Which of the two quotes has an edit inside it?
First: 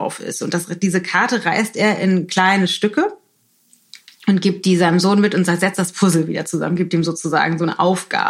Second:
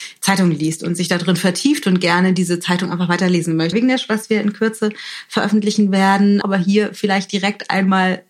second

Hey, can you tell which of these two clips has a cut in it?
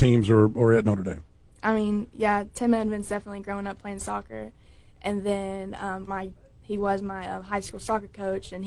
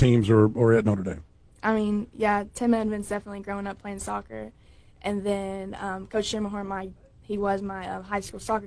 first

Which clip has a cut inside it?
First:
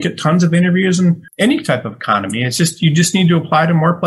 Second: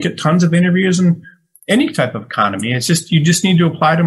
first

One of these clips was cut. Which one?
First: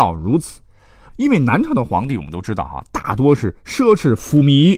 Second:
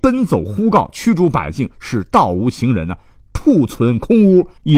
first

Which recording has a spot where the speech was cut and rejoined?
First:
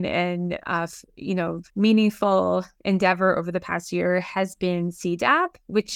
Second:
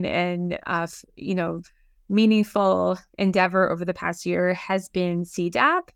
first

